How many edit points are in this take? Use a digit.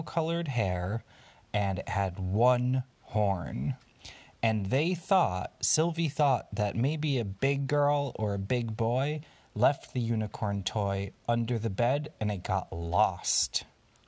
0